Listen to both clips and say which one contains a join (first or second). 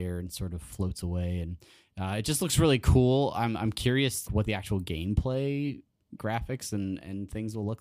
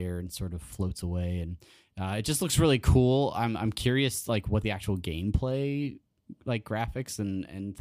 first